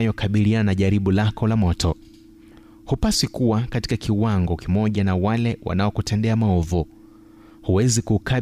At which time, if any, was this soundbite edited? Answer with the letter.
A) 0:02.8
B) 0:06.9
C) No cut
C